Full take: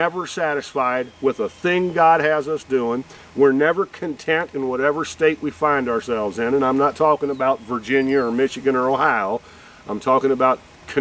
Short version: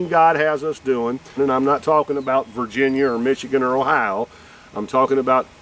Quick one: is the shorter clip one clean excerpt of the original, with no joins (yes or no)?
no